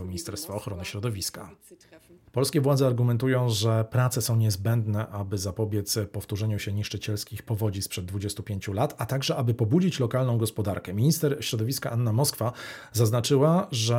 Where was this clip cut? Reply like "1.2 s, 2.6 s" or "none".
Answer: 2.3 s